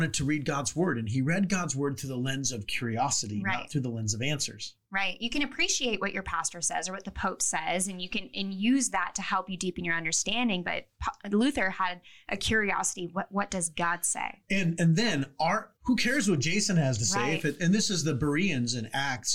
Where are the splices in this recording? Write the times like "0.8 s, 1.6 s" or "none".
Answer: 15.8 s

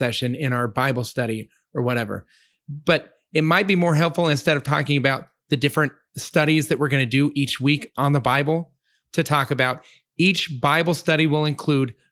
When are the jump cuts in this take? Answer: none

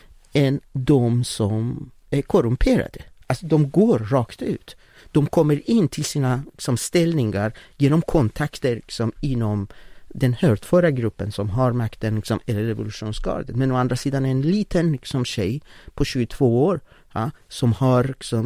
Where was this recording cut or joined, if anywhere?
none

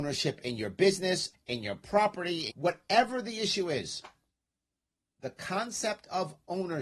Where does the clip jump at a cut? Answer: 1.3 s, 2.5 s

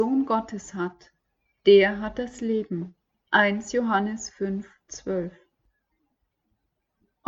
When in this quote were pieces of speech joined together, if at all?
3.1 s

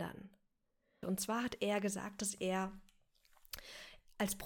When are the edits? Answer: 1.0 s

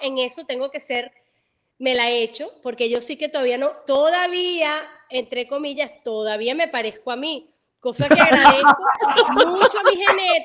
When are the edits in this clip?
none

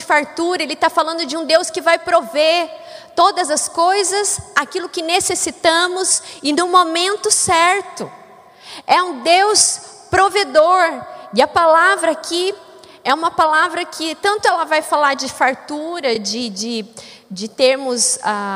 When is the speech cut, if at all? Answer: none

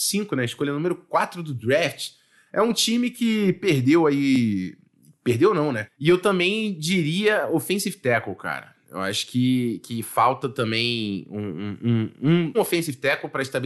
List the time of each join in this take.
5.9 s, 12.5 s

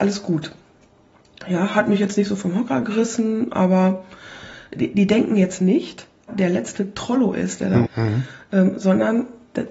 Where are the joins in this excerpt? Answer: 6.3 s, 7.8 s

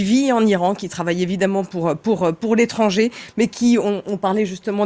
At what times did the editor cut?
none

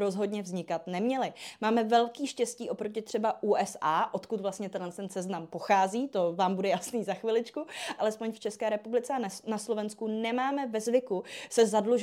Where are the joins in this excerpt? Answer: 8.0 s

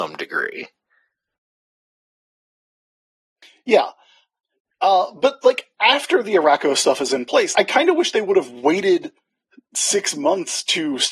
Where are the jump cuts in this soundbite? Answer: 7.5 s

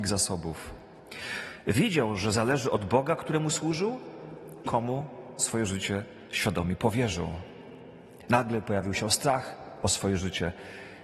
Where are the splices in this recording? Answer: 4.6 s, 8.3 s

